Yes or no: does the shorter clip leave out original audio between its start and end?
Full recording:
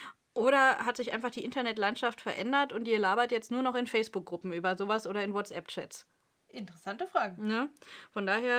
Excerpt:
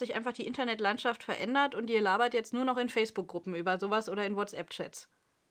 no